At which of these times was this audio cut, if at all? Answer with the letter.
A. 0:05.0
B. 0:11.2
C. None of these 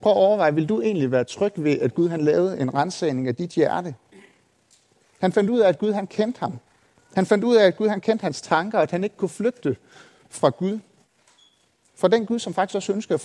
A